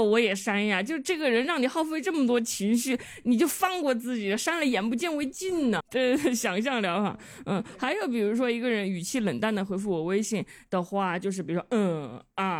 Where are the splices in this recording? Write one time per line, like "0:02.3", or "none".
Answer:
0:05.8